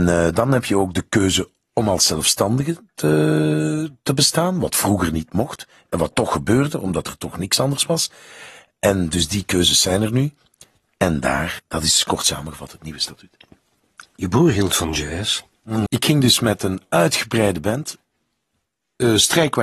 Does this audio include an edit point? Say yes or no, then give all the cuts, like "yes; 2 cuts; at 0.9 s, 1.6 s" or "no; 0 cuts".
yes; 2 cuts; at 11.6 s, 15.9 s